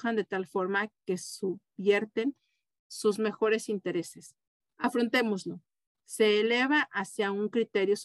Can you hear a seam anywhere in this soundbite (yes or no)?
yes